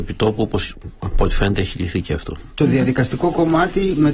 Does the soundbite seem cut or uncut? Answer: uncut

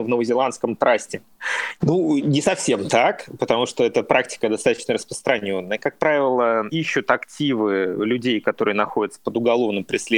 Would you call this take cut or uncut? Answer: cut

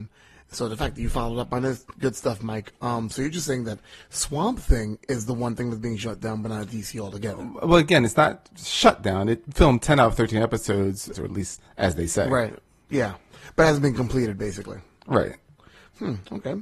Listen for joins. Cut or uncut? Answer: cut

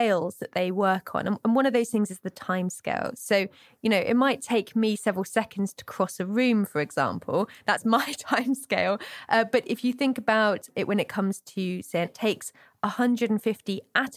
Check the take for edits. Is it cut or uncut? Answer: cut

